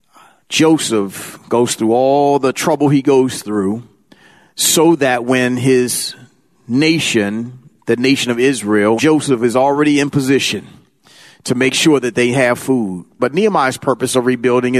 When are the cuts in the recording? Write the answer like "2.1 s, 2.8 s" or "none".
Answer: 9.0 s, 13.2 s

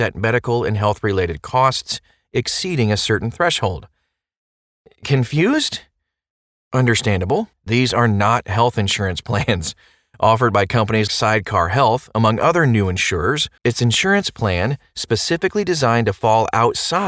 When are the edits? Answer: 7.5 s, 11.1 s, 13.6 s

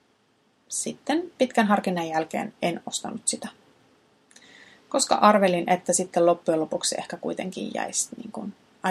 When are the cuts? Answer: none

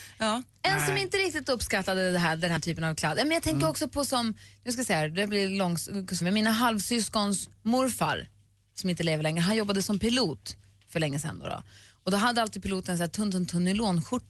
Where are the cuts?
6.2 s

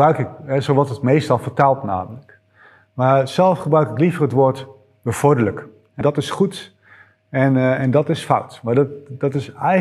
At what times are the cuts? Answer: 6.0 s

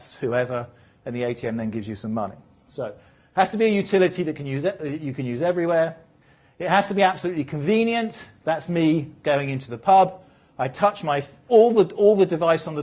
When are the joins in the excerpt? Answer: 11.5 s

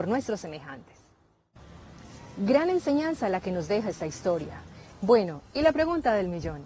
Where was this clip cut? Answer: 4.9 s

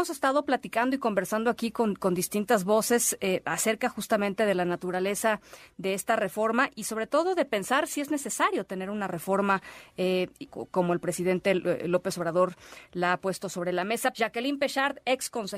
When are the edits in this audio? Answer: 10.5 s, 14.1 s

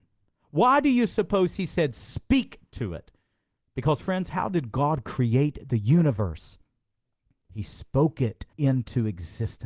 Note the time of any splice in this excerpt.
8.5 s

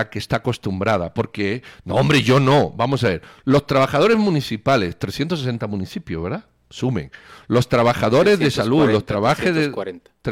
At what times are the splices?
none

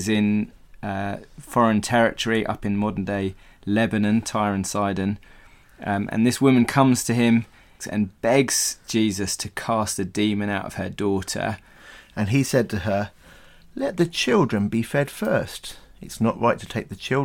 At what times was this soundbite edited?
7.8 s

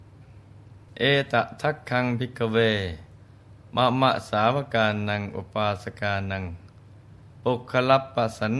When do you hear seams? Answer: 7.3 s

